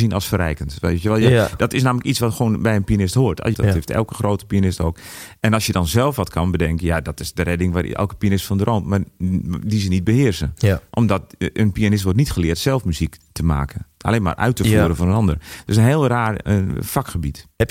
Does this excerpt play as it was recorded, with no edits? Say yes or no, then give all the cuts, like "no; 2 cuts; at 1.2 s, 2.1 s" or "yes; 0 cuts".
no; 1 cut; at 3.5 s